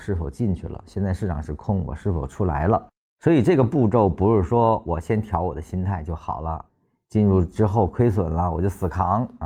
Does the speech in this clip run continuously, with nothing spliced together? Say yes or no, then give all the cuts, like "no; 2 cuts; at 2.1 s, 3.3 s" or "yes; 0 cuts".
no; 1 cut; at 3.0 s